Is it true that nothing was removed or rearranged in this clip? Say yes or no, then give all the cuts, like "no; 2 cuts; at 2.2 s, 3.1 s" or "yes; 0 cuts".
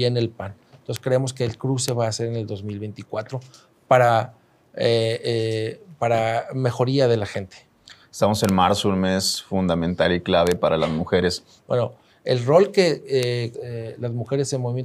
no; 2 cuts; at 11.6 s, 13.5 s